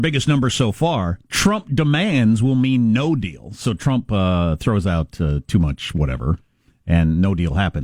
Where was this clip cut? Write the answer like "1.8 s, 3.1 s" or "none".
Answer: 1.2 s